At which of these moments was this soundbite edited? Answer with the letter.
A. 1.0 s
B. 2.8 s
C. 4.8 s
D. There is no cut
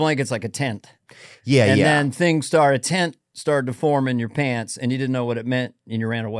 D